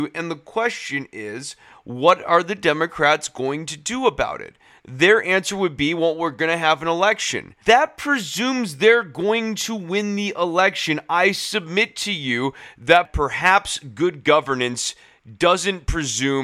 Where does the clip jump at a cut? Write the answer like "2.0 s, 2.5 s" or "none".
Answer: 7.6 s